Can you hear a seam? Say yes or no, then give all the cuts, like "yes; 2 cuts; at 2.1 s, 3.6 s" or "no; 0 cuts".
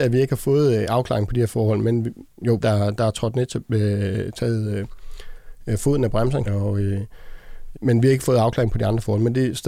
yes; 3 cuts; at 2.6 s, 6.5 s, 7.7 s